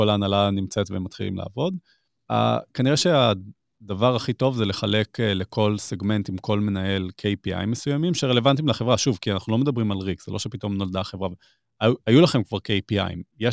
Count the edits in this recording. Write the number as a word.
zero